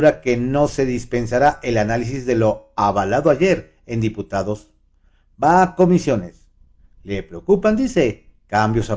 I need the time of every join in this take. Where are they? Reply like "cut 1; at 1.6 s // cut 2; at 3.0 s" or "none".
none